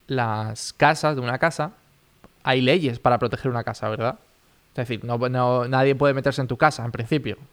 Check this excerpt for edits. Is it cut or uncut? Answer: uncut